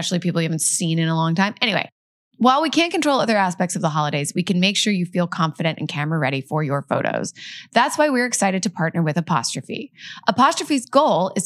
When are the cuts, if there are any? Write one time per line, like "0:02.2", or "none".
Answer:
none